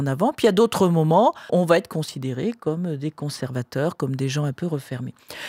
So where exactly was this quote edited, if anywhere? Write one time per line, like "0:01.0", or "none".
0:01.5